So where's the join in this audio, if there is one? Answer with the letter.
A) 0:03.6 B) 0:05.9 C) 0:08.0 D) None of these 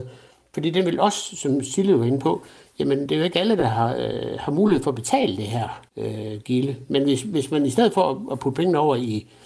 B